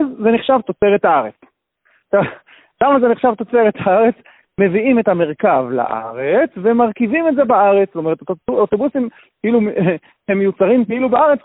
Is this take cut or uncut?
cut